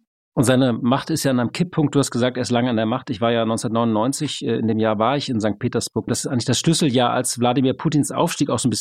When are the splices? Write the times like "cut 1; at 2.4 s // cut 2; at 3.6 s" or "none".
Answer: cut 1; at 6.1 s

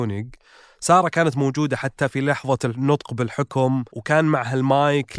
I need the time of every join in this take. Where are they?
cut 1; at 3.9 s

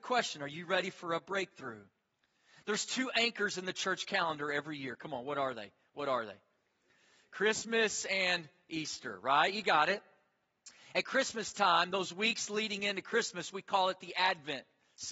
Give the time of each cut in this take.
none

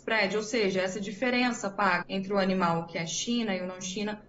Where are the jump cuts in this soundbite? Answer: cut 1; at 2.0 s

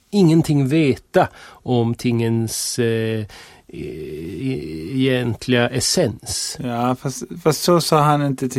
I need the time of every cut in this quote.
none

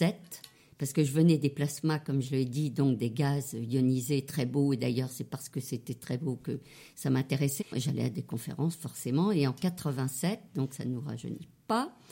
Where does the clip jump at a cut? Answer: cut 1; at 7.6 s

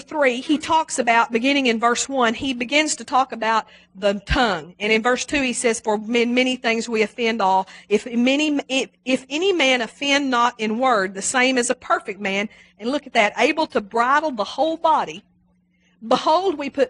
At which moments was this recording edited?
none

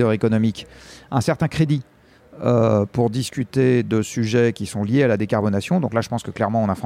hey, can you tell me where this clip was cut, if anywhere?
none

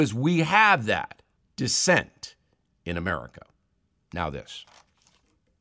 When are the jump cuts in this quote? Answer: none

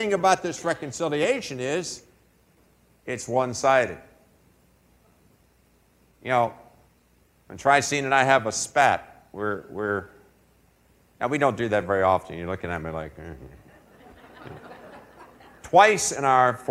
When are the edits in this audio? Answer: none

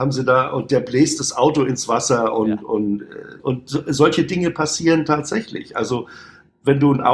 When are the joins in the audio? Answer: cut 1; at 3.4 s

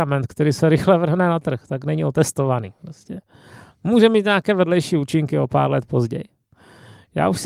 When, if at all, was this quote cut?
none

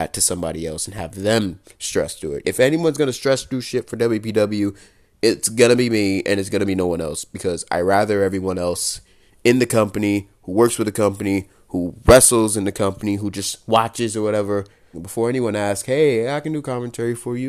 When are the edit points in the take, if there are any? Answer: cut 1; at 2.4 s // cut 2; at 14.9 s

